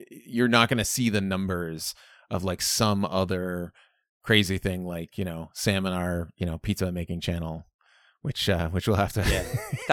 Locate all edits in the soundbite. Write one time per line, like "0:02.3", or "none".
none